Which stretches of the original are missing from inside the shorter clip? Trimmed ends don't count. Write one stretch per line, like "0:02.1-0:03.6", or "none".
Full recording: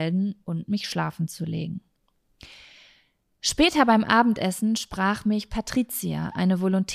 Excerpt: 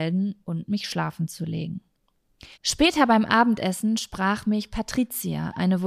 0:02.5-0:03.3